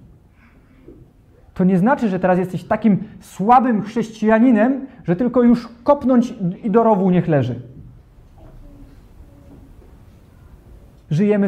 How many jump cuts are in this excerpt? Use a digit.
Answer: 0